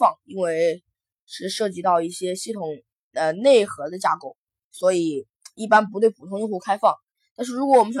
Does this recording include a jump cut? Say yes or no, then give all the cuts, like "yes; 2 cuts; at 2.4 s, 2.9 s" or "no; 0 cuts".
no; 0 cuts